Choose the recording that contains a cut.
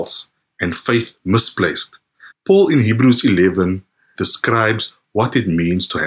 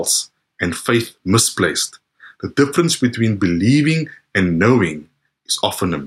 first; 2 cuts; at 2.3 s, 4.1 s

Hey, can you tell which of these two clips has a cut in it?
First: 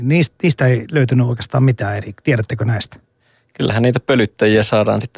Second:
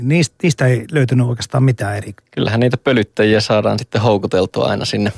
second; 1 cut; at 2.2 s

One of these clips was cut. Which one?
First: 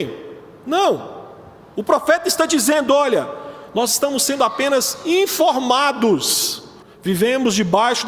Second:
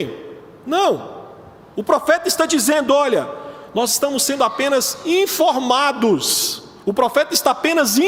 first; 1 cut; at 6.8 s

